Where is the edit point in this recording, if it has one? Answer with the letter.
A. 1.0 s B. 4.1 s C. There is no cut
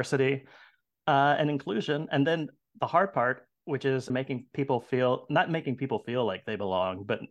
B